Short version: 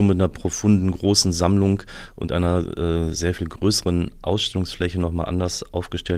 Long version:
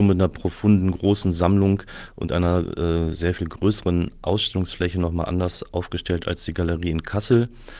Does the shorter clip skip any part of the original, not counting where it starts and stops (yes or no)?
no